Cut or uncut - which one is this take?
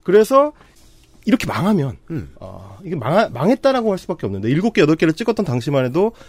uncut